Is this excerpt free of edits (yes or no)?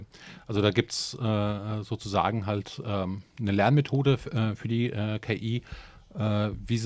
yes